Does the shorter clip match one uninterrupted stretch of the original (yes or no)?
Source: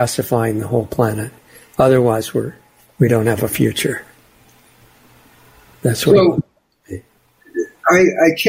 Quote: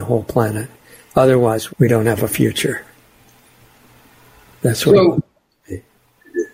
no